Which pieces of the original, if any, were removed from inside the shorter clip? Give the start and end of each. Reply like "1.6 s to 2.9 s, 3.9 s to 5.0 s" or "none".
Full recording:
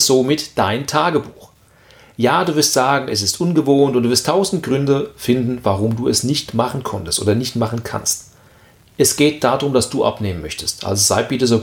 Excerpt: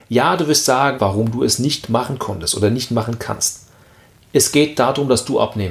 3.1 s to 5.6 s